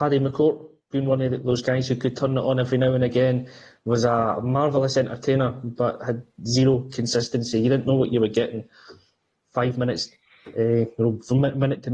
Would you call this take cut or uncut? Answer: uncut